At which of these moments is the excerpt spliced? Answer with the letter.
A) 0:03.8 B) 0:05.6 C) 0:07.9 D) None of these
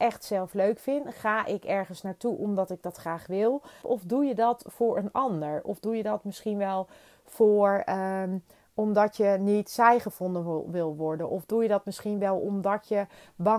A